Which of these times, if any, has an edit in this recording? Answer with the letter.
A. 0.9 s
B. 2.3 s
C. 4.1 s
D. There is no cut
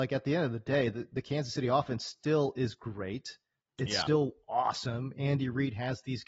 D